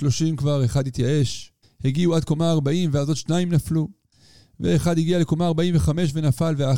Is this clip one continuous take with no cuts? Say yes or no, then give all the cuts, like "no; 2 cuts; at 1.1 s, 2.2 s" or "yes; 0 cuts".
no; 1 cut; at 1.6 s